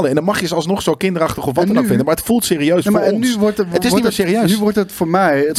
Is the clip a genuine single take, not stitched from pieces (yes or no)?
yes